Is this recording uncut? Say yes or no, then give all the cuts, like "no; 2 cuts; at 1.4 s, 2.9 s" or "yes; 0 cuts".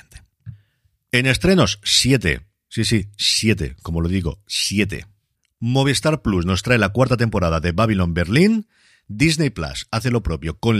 yes; 0 cuts